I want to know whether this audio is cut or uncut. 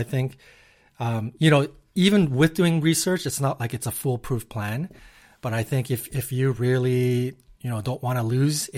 uncut